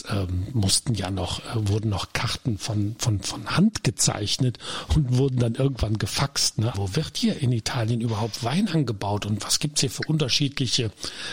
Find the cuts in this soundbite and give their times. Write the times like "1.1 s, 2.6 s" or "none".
6.7 s